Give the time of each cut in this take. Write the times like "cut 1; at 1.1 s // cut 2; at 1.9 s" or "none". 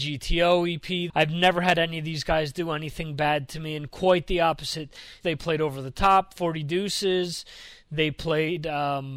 cut 1; at 1.1 s // cut 2; at 5.2 s